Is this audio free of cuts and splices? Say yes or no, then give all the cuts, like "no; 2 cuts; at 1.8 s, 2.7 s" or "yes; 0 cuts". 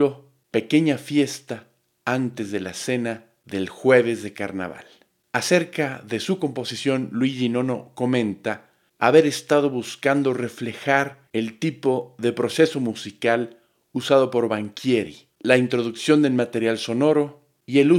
no; 2 cuts; at 11.3 s, 15.3 s